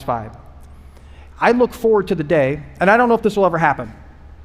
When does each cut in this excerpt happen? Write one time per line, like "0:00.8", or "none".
none